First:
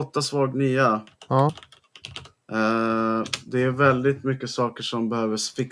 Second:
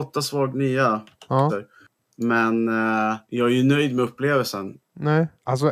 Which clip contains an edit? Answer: second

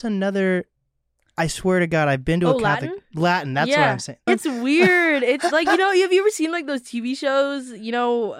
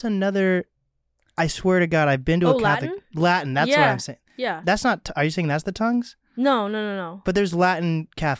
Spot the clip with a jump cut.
first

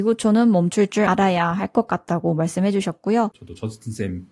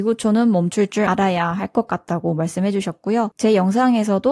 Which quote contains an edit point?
first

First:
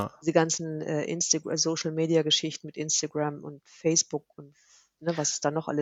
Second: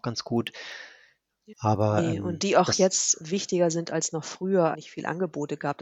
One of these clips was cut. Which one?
second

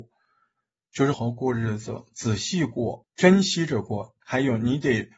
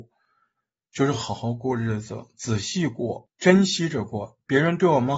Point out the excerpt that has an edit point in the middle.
first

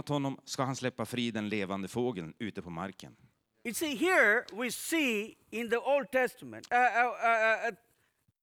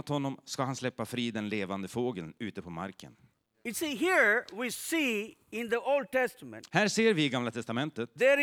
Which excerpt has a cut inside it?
first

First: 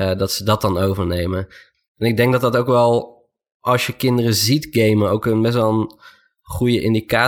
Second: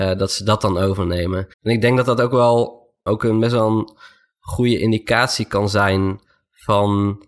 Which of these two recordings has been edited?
second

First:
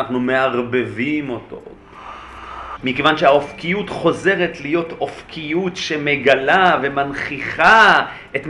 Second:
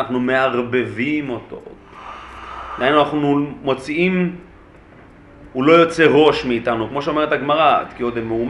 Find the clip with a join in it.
first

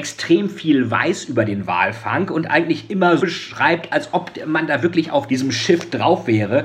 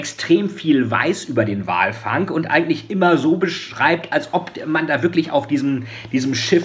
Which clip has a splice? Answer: first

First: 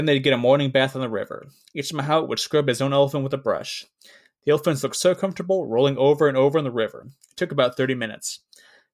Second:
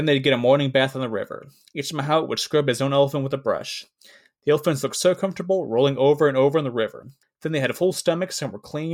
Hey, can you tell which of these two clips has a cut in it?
second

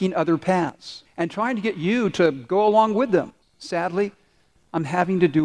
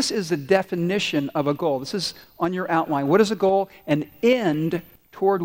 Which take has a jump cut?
first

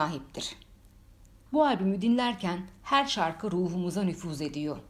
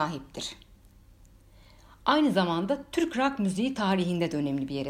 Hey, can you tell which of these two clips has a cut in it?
first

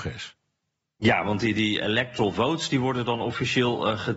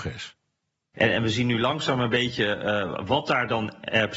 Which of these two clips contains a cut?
second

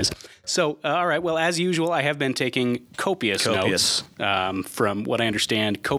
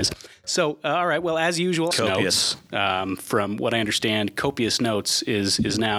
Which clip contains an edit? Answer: second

